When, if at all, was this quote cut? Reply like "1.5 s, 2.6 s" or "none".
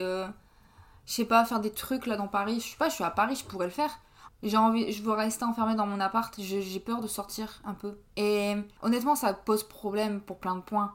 4.3 s, 8.1 s